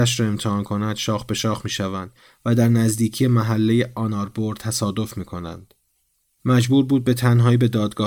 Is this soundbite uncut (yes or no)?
no